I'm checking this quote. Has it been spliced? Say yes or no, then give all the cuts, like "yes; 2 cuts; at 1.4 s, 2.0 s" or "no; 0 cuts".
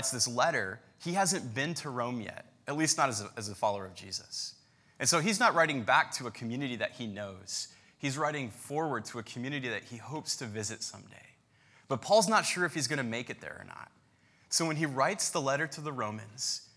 no; 0 cuts